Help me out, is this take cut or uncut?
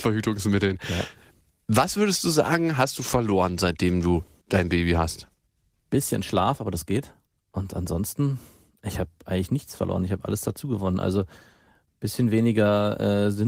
uncut